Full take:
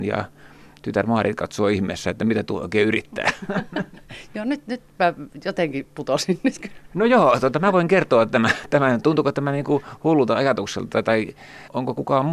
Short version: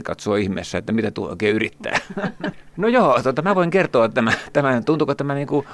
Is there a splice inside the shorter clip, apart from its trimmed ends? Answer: yes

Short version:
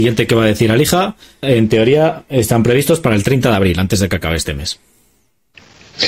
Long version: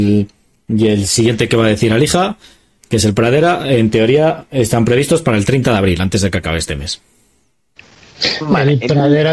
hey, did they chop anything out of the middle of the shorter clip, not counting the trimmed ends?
yes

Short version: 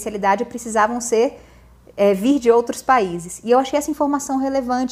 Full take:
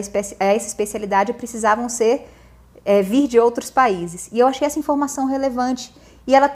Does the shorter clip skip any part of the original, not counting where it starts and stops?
no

